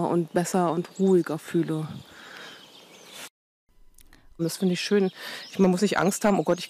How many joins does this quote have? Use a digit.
1